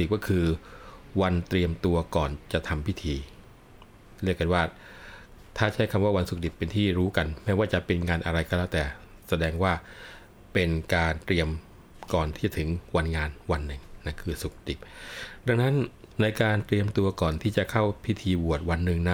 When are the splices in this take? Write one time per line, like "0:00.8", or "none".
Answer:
0:16.1